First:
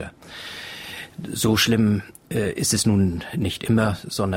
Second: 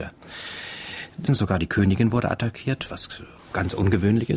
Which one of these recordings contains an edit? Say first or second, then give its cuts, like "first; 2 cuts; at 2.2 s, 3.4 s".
second; 1 cut; at 1.3 s